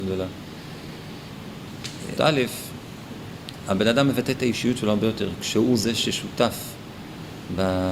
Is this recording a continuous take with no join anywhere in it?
no; 1 cut; at 2.2 s

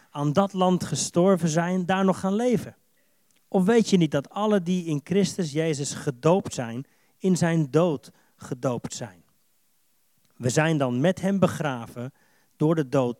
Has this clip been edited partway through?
no; 0 cuts

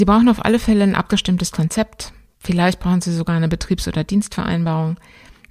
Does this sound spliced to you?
no; 0 cuts

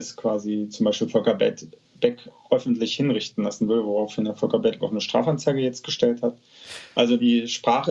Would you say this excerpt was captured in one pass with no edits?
yes; 0 cuts

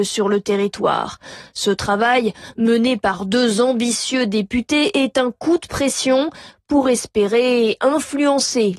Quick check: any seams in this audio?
no; 0 cuts

